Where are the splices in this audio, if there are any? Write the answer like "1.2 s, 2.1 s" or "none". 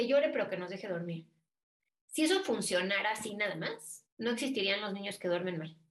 4.1 s